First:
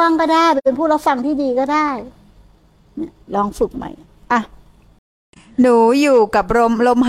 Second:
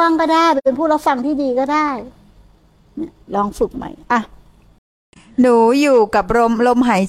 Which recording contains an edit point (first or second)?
second